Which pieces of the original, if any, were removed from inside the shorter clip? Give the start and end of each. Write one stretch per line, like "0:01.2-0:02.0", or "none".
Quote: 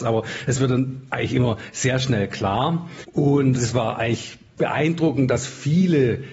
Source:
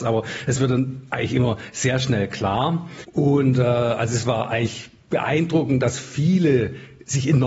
0:03.6-0:04.1